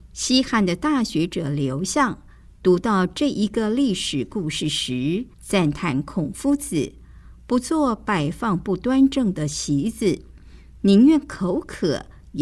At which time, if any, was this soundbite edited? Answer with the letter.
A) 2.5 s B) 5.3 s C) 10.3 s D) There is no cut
B